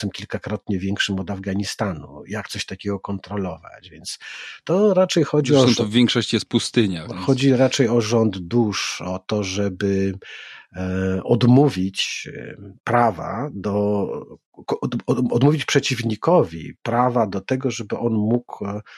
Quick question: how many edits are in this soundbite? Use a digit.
0